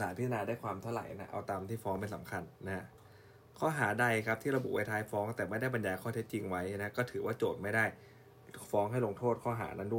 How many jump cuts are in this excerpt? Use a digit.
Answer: 0